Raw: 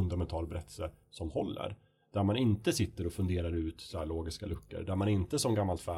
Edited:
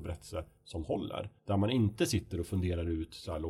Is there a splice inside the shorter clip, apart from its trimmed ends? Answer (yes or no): yes